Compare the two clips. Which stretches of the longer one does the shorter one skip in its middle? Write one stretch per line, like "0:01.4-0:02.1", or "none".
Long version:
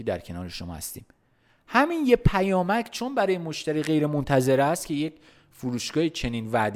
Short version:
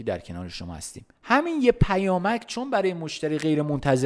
0:01.2-0:01.6